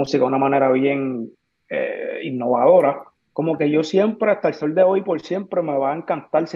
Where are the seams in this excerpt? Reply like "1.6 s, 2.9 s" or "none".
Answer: 3.2 s